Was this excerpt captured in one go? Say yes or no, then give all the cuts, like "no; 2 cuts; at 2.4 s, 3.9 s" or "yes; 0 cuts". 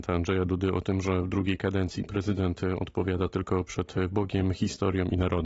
yes; 0 cuts